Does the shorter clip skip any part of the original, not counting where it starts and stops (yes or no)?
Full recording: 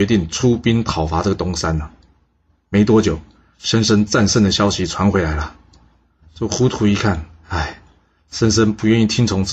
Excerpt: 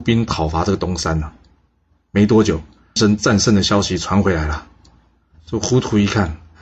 yes